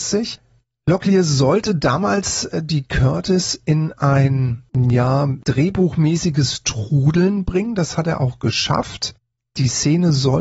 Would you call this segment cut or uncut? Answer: uncut